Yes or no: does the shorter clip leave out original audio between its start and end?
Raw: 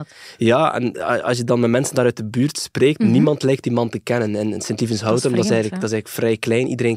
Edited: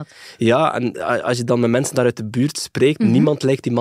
no